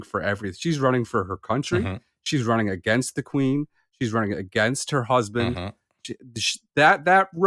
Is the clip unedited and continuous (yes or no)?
yes